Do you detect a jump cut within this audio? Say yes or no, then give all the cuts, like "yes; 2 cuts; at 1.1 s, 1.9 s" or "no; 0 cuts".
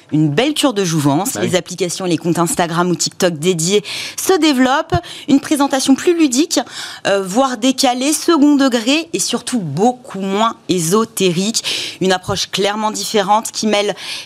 no; 0 cuts